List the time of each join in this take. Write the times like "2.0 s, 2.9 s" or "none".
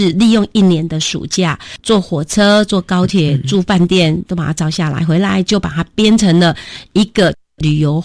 none